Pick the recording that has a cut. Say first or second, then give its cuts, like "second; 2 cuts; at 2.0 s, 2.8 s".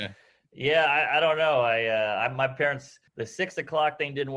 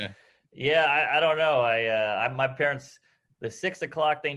first; 1 cut; at 3.1 s